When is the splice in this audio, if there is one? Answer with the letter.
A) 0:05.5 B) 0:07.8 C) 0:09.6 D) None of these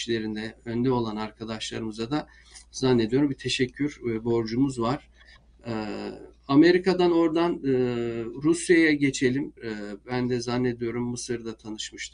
C